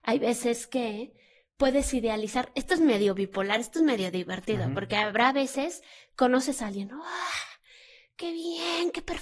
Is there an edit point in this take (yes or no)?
no